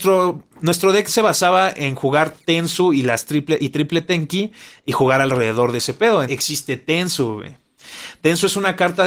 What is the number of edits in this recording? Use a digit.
1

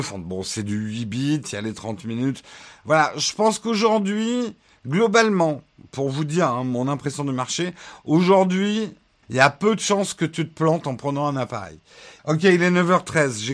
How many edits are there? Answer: 2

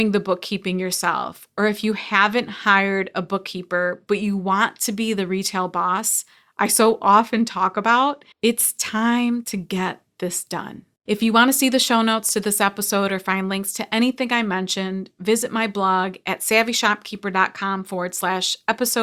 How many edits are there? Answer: 1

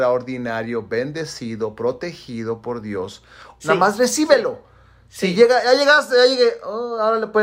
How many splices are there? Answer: 1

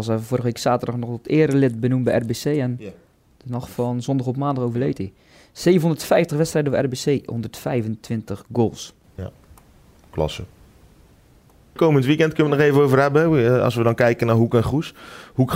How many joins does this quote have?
0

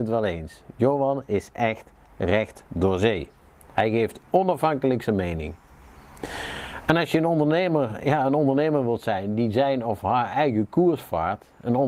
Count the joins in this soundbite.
0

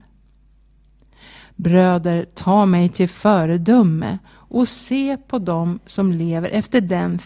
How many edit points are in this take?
0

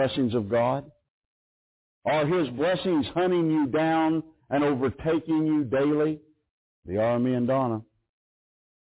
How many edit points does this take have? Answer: 0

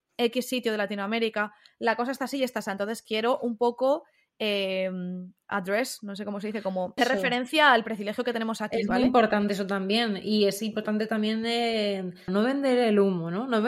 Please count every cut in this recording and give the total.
2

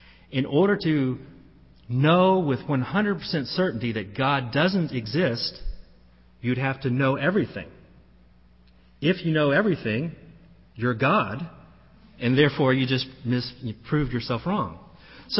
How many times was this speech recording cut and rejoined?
0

